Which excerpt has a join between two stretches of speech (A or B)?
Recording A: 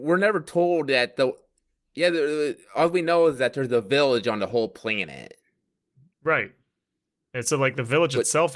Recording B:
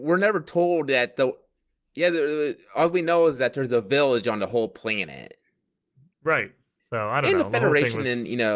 B